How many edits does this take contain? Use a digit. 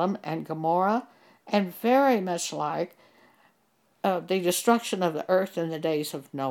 0